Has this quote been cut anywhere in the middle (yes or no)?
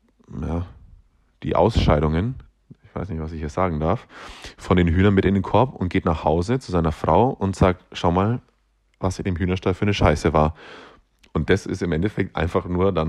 no